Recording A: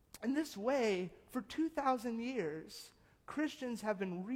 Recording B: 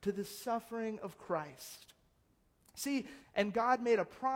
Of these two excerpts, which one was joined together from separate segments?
B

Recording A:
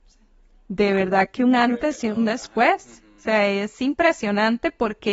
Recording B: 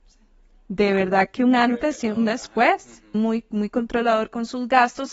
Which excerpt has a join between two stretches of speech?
B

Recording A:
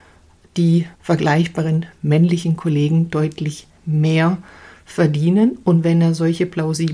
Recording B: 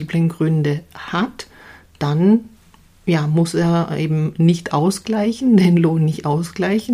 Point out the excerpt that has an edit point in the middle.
A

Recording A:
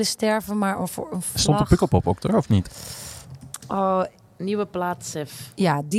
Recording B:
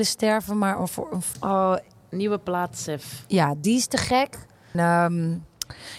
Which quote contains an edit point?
B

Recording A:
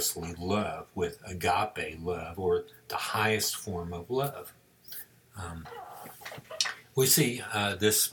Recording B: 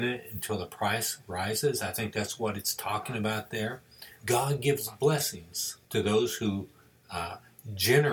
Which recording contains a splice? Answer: B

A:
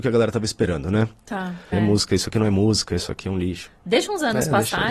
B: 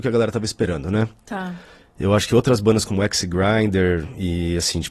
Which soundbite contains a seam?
A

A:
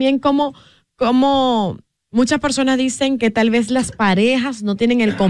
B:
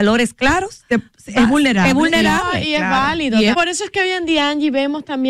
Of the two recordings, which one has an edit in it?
B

